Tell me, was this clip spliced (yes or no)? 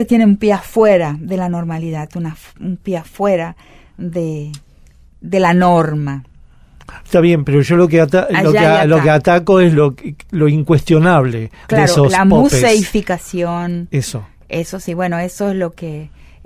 no